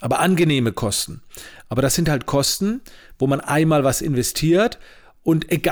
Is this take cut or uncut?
uncut